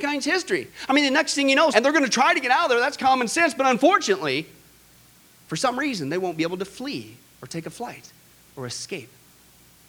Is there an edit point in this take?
yes; 1 cut; at 1.7 s

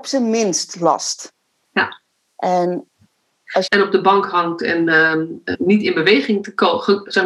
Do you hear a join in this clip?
yes; 3 cuts; at 2.3 s, 3.7 s, 5.5 s

